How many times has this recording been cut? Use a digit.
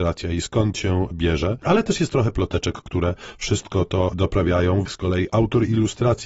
1